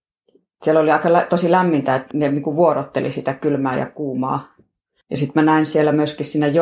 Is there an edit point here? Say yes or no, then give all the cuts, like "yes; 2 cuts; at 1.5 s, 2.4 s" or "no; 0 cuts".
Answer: yes; 2 cuts; at 2.1 s, 5.0 s